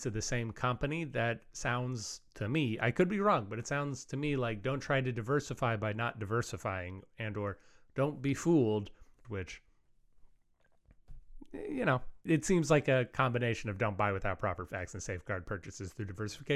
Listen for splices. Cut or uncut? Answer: cut